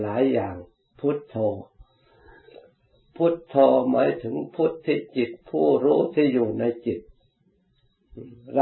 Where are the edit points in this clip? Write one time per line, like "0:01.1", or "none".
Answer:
none